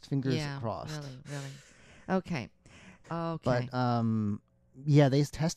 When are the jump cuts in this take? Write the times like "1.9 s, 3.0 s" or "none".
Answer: 3.0 s

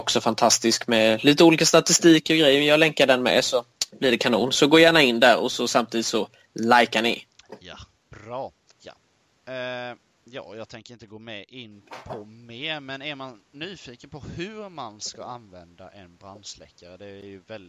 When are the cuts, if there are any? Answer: 8.7 s

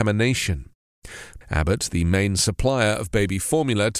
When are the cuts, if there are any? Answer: 1.4 s

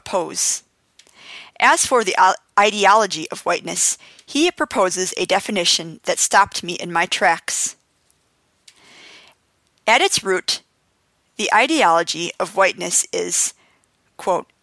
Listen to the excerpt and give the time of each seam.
none

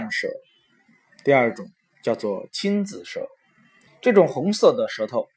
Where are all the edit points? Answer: 3.9 s

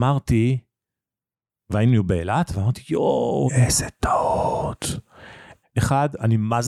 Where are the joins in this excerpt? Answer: 3.5 s, 5.6 s

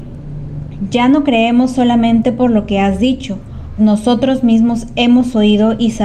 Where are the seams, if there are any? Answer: 3.8 s

